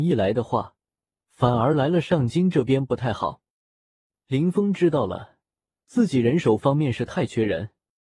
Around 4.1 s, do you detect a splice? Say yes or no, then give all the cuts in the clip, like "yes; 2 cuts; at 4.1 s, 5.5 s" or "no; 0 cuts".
no; 0 cuts